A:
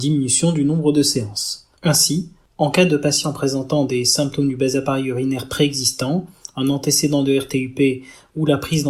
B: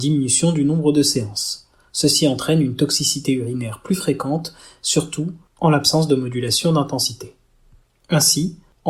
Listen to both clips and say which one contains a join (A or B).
A